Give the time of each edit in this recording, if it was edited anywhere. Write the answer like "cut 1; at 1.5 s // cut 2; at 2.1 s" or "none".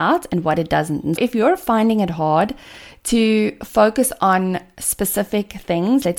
cut 1; at 1.2 s